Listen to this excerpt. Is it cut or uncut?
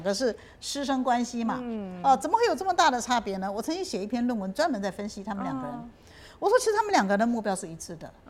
uncut